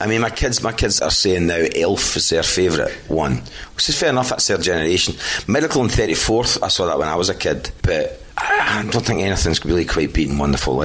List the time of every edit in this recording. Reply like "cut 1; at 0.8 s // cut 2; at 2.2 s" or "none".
cut 1; at 1.0 s